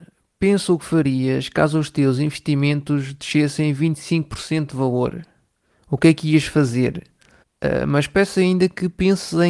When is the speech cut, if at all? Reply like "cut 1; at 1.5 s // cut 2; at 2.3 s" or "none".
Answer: cut 1; at 7.4 s